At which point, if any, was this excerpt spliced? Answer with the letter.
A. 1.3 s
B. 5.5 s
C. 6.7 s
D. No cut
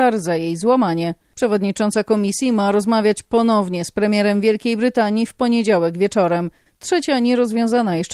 C